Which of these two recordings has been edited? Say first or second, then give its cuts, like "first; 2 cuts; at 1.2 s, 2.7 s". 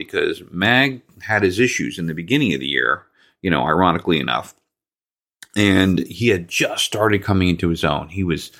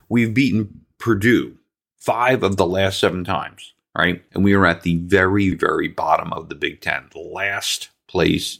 second; 2 cuts; at 4.3 s, 5.5 s